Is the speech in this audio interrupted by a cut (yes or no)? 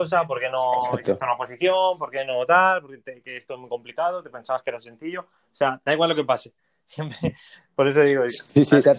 no